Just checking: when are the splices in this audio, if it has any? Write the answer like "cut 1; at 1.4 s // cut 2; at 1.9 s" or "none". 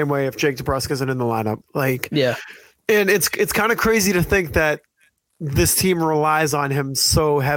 cut 1; at 1.6 s